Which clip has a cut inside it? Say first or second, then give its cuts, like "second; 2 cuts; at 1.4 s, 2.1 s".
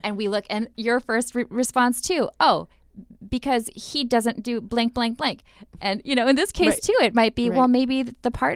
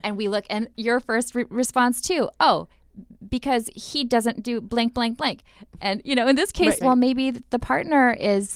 second; 1 cut; at 6.8 s